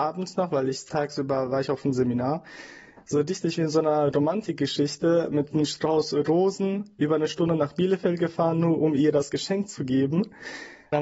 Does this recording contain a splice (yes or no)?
no